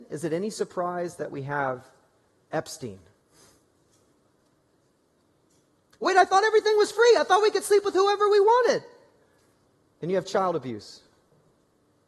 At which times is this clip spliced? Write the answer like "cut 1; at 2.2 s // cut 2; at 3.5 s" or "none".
none